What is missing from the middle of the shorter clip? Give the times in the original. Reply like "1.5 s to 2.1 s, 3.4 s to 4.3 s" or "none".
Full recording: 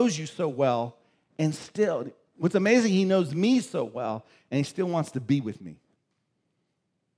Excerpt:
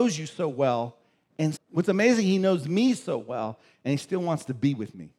1.6 s to 2.2 s